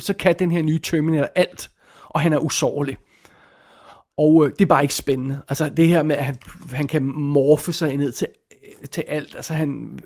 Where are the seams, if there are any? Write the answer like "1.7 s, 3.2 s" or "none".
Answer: none